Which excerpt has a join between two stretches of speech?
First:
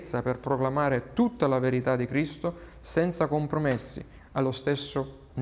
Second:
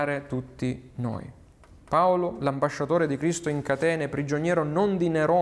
first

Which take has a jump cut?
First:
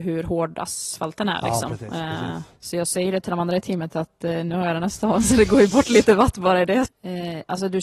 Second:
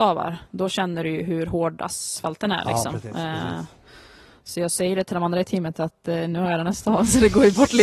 first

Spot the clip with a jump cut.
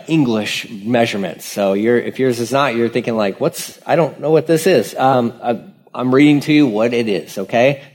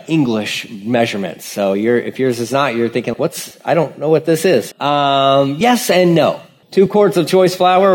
second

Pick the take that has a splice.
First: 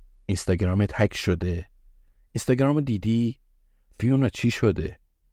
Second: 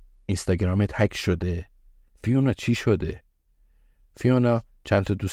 second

